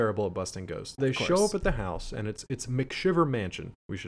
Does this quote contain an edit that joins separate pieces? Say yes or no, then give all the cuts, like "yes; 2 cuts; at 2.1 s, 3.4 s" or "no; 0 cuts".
yes; 1 cut; at 1.0 s